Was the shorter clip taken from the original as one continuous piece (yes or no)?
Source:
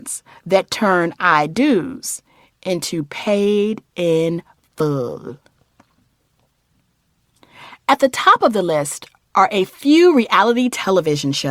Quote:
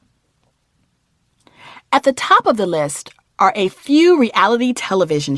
yes